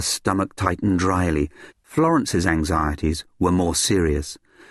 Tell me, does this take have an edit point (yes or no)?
yes